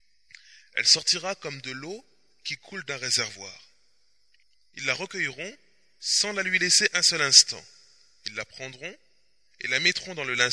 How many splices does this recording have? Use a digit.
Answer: 0